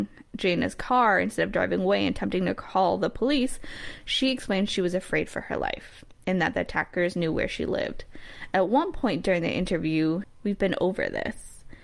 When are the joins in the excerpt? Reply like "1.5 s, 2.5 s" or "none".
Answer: 10.2 s

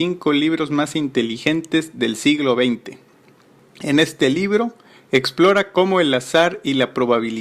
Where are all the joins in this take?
none

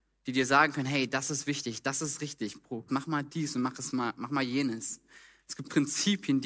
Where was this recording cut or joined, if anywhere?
2.9 s

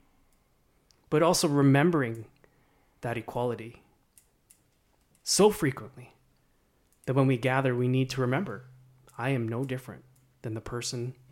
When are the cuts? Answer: none

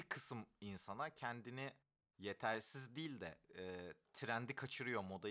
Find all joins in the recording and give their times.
none

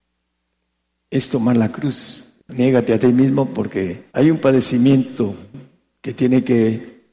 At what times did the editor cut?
2.4 s, 4.1 s

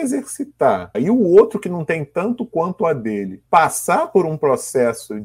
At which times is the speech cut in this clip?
0.9 s, 3.5 s

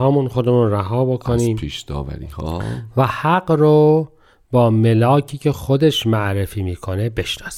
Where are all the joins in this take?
none

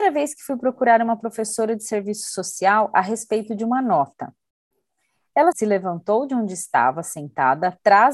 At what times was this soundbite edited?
5.5 s

